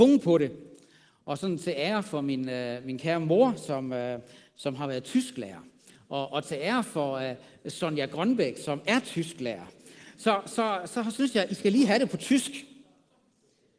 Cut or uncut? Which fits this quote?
uncut